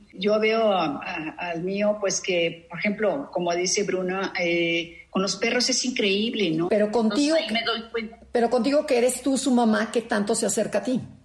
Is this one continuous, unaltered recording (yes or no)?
no